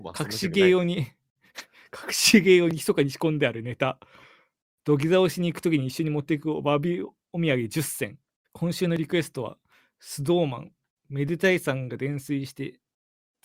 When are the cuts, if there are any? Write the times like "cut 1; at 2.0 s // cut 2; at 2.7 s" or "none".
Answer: cut 1; at 8.4 s

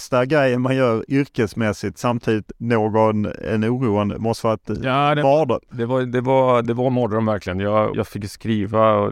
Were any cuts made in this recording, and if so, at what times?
cut 1; at 6.6 s // cut 2; at 7.9 s

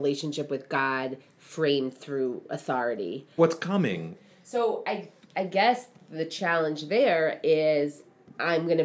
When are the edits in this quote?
cut 1; at 3.4 s

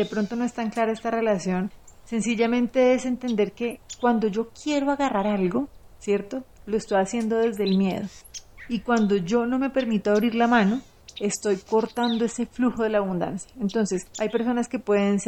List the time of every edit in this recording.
none

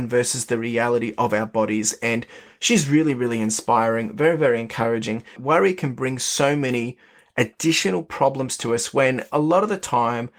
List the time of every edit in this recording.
cut 1; at 5.4 s

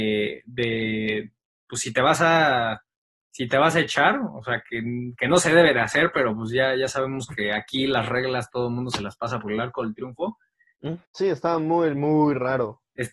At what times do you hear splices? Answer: cut 1; at 11.0 s

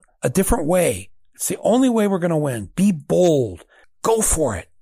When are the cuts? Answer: cut 1; at 3.8 s

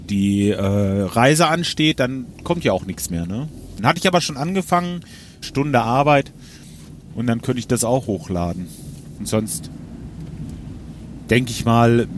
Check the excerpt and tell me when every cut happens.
cut 1; at 3.8 s // cut 2; at 5.4 s // cut 3; at 9.2 s

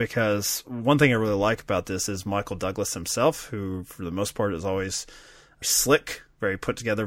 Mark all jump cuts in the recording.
cut 1; at 5.6 s

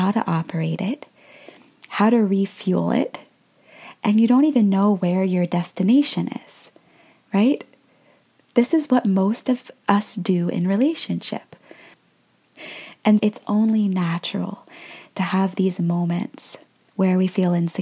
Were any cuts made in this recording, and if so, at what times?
cut 1; at 11.9 s // cut 2; at 13.2 s

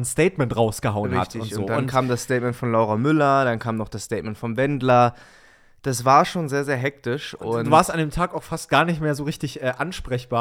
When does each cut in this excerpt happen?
none

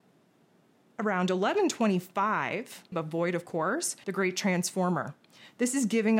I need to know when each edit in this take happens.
cut 1; at 2.9 s // cut 2; at 4.0 s

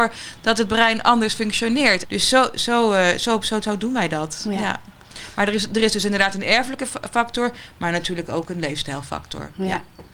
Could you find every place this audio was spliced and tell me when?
cut 1; at 2.0 s

